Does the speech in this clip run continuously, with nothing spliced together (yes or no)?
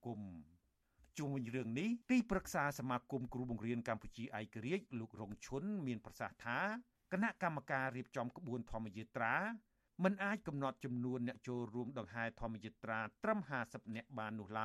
no